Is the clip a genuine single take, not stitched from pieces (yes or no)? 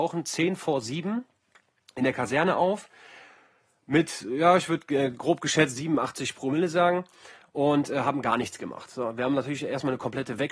yes